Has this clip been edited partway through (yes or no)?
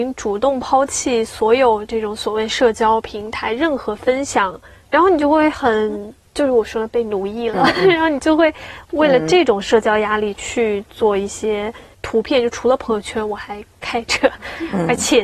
yes